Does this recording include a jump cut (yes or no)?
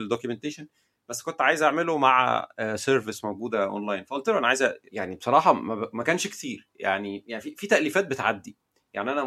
yes